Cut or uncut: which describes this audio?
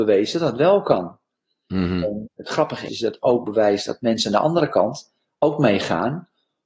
cut